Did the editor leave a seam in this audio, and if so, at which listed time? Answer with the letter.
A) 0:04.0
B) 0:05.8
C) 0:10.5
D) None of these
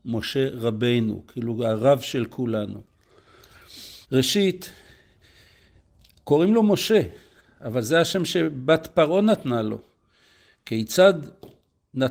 A